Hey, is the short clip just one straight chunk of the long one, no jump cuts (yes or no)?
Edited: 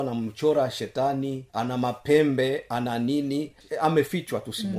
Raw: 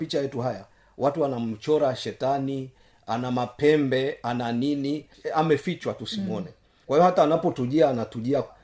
no